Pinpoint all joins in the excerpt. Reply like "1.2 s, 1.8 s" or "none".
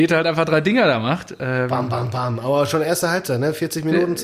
none